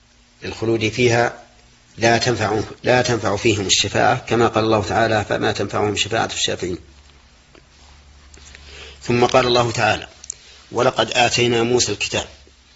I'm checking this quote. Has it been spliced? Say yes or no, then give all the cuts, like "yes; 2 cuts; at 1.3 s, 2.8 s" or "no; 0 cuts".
no; 0 cuts